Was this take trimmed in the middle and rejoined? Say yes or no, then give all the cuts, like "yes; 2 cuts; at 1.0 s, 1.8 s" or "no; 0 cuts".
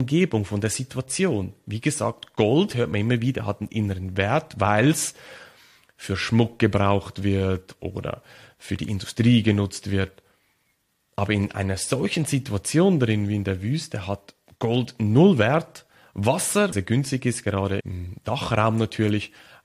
yes; 2 cuts; at 16.7 s, 17.8 s